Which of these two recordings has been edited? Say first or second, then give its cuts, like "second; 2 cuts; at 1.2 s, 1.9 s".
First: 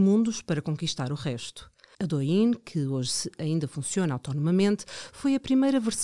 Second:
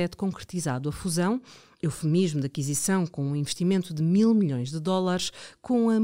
first; 1 cut; at 1.9 s